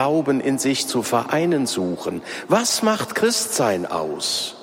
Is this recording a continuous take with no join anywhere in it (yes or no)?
yes